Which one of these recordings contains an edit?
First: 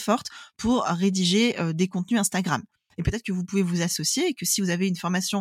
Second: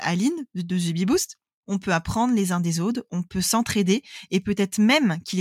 second; 1 cut; at 1.6 s

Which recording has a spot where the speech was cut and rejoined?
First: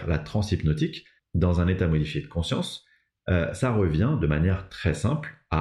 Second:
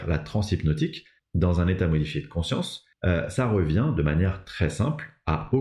second; 1 cut; at 2.9 s

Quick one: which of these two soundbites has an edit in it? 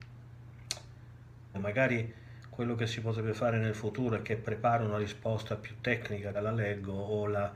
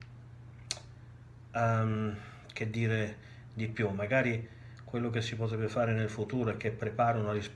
first; 2 cuts; at 1.5 s, 6.3 s

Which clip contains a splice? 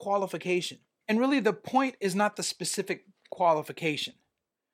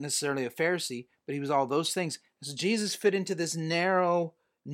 first; 1 cut; at 1.0 s

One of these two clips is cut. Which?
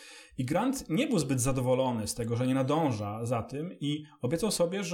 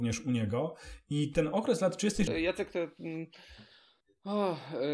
second; 1 cut; at 2.3 s

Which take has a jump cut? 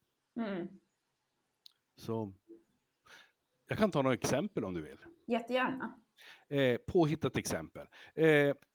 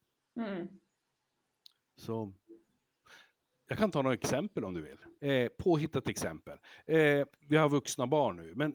second; 2 cuts; at 5.2 s, 7.4 s

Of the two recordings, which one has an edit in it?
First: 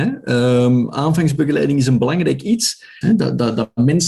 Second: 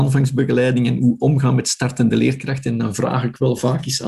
first; 1 cut; at 3.0 s

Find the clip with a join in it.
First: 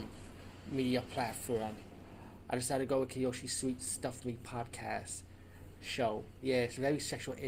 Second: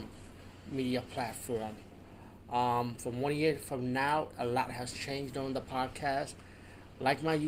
first; 1 cut; at 2.5 s

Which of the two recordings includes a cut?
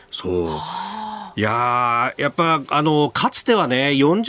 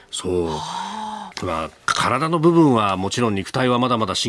second; 1 cut; at 1.3 s

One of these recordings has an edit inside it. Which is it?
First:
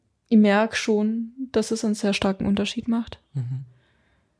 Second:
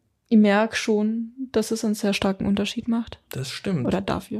second; 1 cut; at 3.3 s

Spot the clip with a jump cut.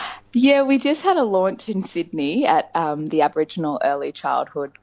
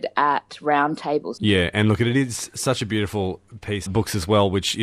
second; 2 cuts; at 1.4 s, 3.9 s

